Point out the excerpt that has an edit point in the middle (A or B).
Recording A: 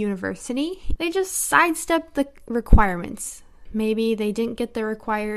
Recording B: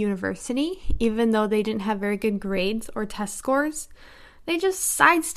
A